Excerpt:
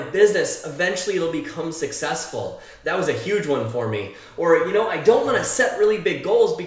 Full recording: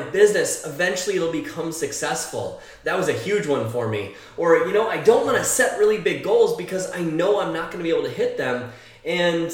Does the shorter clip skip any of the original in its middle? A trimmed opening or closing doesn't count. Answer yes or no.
no